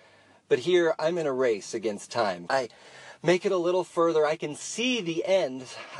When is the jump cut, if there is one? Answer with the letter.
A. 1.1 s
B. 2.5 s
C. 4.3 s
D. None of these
B